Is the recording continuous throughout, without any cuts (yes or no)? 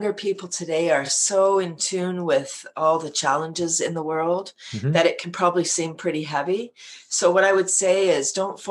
yes